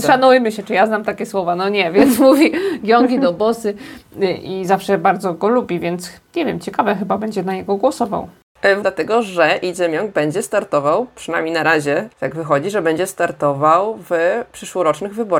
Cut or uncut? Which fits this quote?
cut